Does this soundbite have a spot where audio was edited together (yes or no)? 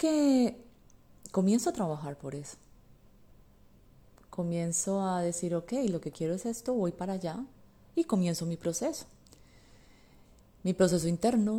no